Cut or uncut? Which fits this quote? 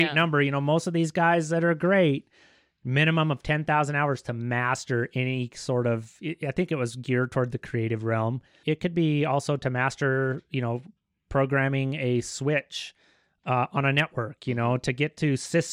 cut